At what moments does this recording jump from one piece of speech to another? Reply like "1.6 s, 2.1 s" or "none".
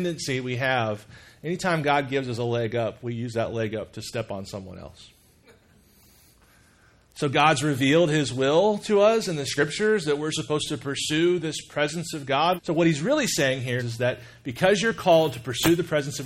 12.6 s, 13.8 s